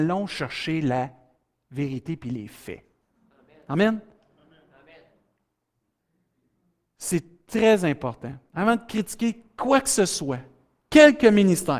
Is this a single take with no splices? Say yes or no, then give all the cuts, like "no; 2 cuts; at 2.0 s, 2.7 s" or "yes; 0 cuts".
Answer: yes; 0 cuts